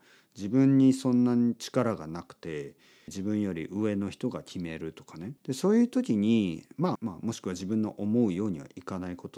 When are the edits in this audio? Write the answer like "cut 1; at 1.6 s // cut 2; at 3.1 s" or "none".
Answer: cut 1; at 3.1 s // cut 2; at 5.4 s // cut 3; at 7.0 s